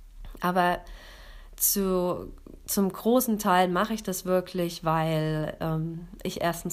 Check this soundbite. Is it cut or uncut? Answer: uncut